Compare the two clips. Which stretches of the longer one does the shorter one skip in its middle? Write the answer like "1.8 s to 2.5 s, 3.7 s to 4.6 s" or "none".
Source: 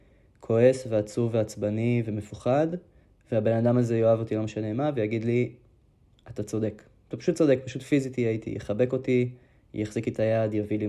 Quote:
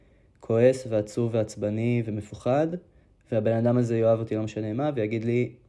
none